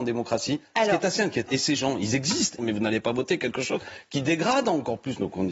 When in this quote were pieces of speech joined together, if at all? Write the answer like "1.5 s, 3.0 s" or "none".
1.5 s, 2.6 s